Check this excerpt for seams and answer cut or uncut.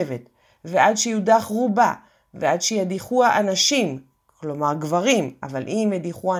uncut